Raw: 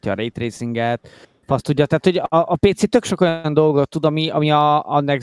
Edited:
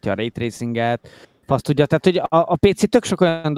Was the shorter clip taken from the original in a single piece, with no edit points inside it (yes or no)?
yes